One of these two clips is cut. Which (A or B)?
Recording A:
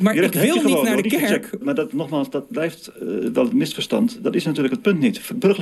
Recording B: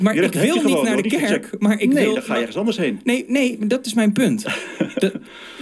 A